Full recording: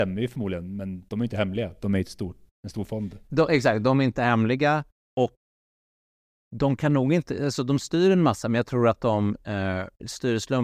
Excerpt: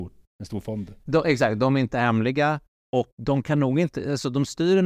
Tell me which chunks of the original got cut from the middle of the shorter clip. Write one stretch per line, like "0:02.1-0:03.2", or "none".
0:05.4-0:06.5